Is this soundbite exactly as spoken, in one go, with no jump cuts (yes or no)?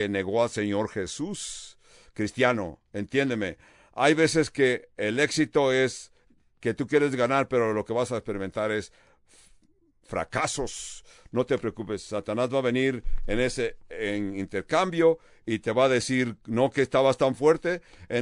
yes